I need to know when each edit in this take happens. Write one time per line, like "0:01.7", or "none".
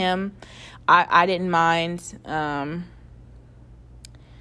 none